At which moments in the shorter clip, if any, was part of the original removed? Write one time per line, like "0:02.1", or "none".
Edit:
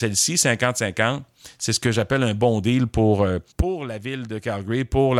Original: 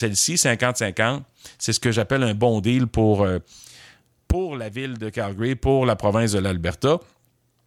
0:03.5